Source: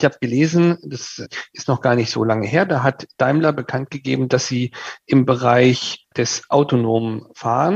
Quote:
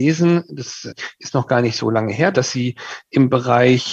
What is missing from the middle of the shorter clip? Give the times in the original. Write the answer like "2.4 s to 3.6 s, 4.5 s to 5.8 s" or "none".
2.7 s to 4.3 s